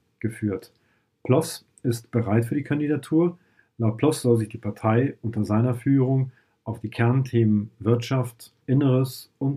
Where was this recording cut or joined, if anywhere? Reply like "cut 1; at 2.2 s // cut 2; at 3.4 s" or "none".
cut 1; at 8.6 s